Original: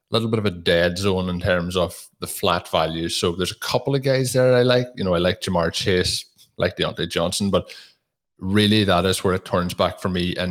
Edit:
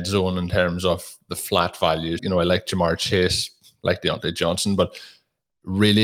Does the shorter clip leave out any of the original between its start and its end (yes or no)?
yes